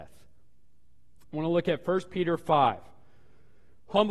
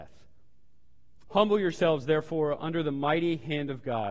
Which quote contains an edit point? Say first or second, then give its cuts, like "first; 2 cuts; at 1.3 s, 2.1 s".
second; 1 cut; at 1.3 s